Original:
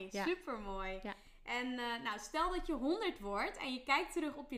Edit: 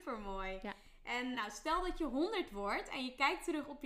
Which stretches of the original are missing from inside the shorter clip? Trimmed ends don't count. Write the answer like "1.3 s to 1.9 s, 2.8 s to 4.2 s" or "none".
1.7 s to 2.0 s